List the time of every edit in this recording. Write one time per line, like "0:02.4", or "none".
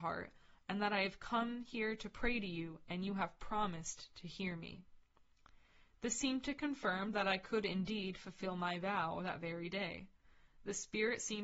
none